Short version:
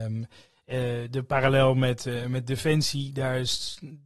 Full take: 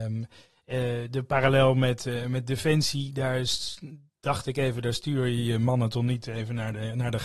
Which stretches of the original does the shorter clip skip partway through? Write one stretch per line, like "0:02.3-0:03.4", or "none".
none